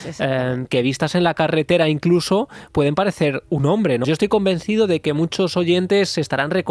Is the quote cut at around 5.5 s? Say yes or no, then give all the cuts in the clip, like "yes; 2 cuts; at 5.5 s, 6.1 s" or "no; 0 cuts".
no; 1 cut; at 4.0 s